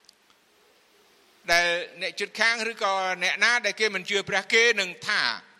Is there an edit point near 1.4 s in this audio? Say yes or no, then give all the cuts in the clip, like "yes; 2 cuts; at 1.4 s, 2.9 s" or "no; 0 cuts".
no; 0 cuts